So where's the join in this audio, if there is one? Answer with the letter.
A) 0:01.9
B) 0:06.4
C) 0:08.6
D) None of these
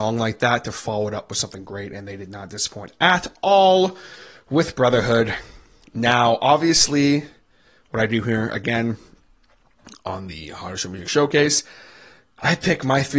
D